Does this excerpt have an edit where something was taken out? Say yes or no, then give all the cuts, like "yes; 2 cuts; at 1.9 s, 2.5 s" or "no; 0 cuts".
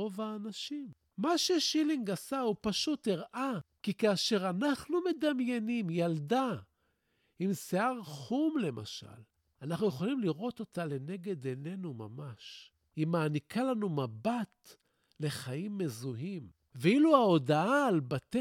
no; 0 cuts